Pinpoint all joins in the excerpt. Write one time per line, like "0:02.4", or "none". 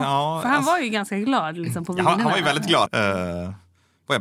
0:02.9